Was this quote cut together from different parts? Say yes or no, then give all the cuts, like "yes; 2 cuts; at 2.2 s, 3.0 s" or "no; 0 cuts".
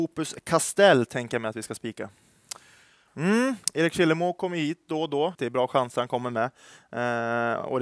yes; 2 cuts; at 3.1 s, 5.3 s